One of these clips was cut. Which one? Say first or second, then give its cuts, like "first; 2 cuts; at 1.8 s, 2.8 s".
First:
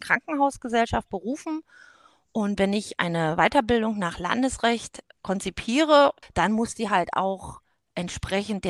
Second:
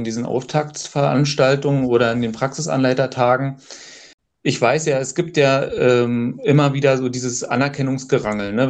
first; 2 cuts; at 5.1 s, 6.2 s